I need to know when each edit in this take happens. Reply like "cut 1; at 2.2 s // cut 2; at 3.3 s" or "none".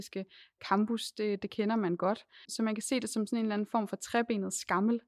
cut 1; at 2.4 s